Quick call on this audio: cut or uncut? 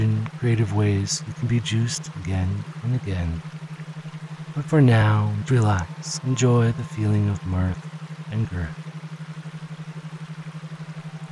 cut